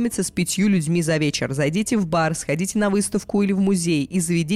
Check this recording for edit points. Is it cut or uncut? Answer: uncut